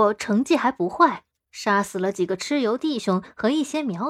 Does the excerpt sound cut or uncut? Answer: uncut